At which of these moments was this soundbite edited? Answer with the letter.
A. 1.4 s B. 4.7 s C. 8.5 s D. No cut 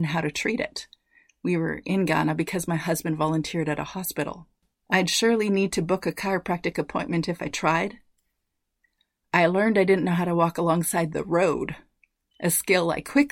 B